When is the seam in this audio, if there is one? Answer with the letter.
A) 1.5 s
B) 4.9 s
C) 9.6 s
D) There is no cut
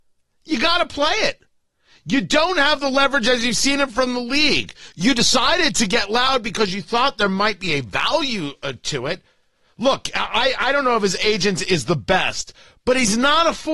D